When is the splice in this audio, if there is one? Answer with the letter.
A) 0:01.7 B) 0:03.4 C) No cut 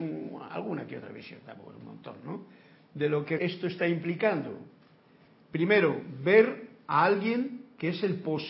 B